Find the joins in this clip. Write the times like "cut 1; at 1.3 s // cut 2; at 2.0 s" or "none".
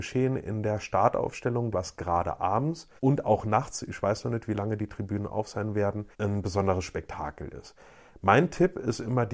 cut 1; at 1.7 s // cut 2; at 3.0 s // cut 3; at 6.1 s